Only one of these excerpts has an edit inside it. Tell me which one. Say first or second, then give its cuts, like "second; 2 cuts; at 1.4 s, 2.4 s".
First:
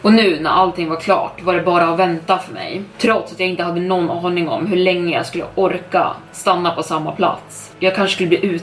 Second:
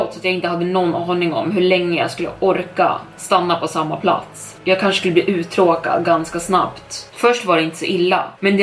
second; 1 cut; at 7.1 s